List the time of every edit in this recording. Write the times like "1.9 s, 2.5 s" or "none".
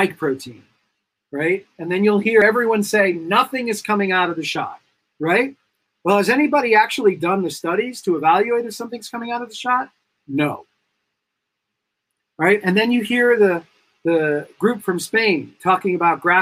none

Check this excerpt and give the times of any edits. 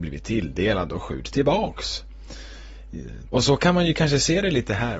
3.3 s

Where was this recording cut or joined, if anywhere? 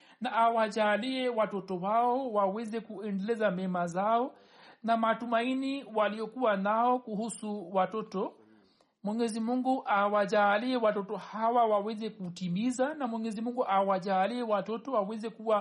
none

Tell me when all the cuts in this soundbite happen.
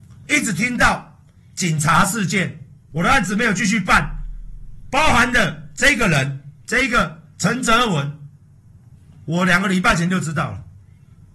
2.9 s

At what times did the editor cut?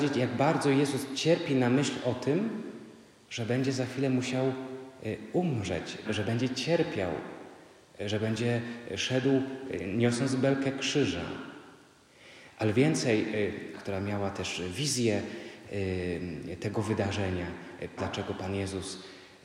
6.0 s, 13.7 s, 18.0 s

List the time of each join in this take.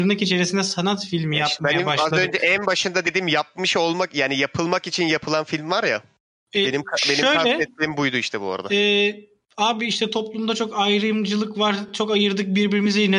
none

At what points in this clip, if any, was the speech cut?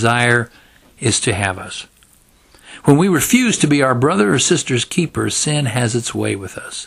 none

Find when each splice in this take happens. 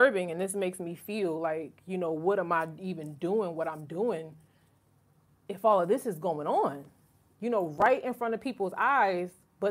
none

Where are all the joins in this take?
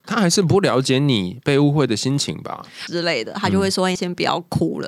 2.9 s, 4.0 s

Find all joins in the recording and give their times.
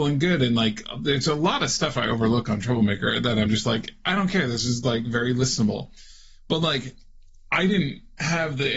none

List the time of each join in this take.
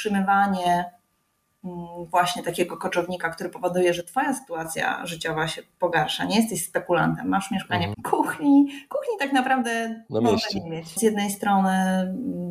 7.9 s, 11.0 s

